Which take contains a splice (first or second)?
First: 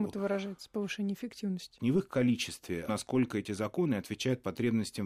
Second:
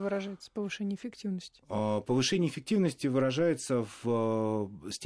first